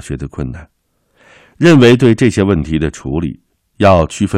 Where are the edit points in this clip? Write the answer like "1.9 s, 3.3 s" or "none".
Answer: none